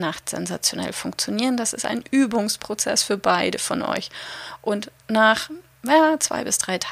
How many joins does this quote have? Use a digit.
0